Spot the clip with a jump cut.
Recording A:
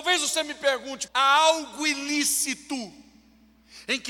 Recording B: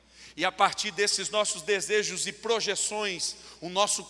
A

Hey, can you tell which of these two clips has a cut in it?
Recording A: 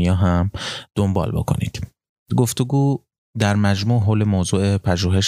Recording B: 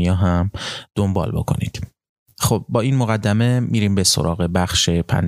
A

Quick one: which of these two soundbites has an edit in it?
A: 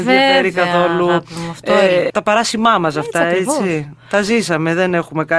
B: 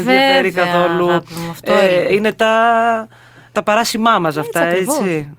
A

